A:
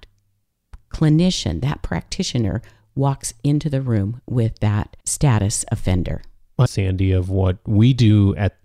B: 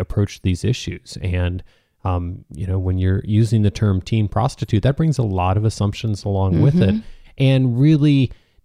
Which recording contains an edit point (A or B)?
A